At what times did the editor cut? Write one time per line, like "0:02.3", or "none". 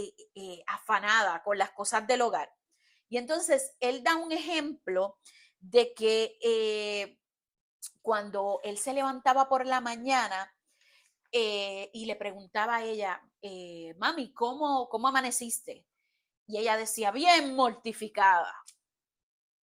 none